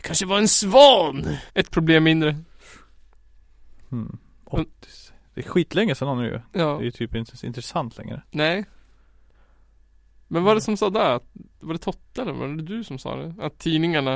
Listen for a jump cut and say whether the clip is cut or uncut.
cut